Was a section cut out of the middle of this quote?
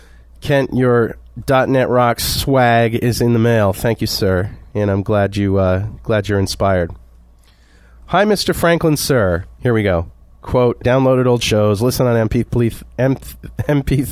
yes; 1 cut; at 10.8 s

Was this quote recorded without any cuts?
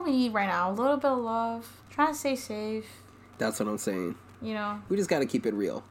no; 1 cut; at 1.8 s

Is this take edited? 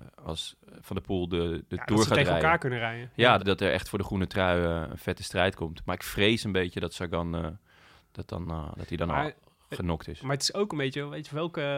yes; 1 cut; at 3.4 s

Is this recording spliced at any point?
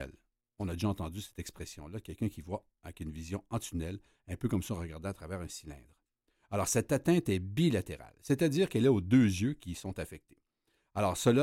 no; 0 cuts

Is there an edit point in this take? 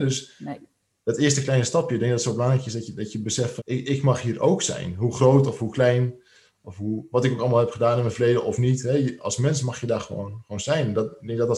yes; 1 cut; at 3.6 s

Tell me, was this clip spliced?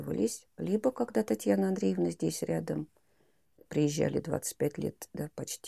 no; 0 cuts

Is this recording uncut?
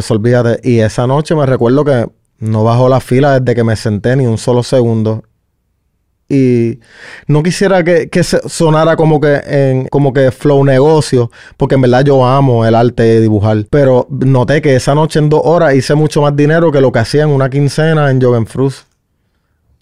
no; 2 cuts; at 9.9 s, 13.7 s

